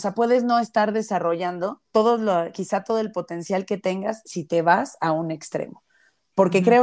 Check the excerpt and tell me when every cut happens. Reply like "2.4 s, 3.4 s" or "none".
1.9 s